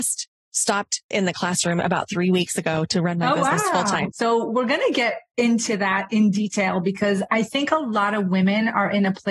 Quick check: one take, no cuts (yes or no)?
no